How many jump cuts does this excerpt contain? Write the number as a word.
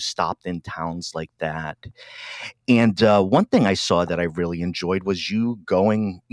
zero